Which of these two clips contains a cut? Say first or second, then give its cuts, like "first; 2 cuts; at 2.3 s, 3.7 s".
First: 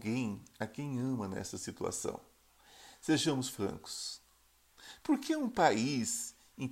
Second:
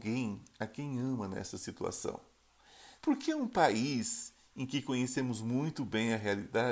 second; 1 cut; at 3.0 s